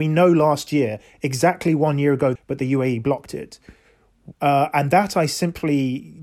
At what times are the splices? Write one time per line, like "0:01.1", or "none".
0:02.4
0:04.3